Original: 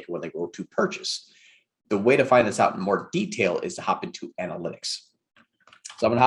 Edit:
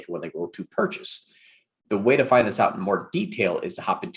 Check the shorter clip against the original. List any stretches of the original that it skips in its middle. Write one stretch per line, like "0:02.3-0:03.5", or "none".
none